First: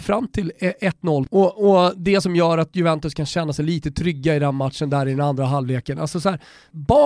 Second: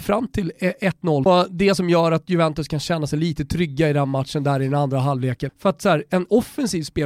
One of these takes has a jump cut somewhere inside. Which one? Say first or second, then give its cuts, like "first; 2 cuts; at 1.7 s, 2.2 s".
second; 2 cuts; at 1.3 s, 5.5 s